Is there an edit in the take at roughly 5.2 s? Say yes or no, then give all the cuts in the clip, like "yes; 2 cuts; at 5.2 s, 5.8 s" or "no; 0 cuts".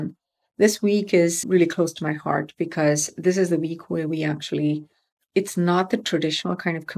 yes; 2 cuts; at 1.4 s, 5.2 s